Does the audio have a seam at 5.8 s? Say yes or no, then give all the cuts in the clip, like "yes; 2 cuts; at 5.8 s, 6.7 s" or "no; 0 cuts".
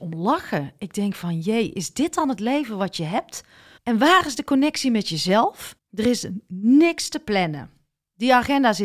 yes; 2 cuts; at 3.8 s, 5.8 s